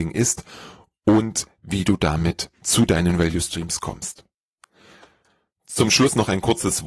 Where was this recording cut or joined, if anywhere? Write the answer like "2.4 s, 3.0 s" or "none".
none